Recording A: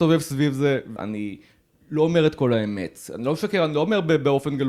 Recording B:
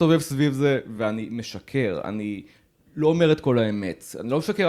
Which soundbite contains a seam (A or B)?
A